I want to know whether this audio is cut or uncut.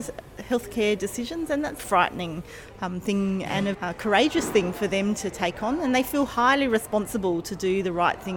cut